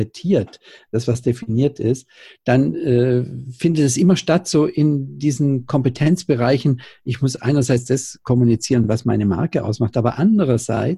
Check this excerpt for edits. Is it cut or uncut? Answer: uncut